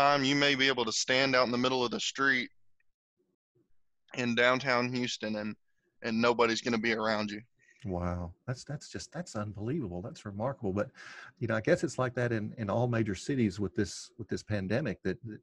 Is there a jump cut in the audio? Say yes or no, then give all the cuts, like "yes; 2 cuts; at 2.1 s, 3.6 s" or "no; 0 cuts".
no; 0 cuts